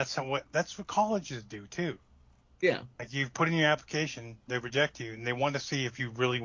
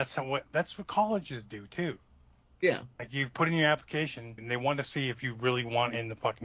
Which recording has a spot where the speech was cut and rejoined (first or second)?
second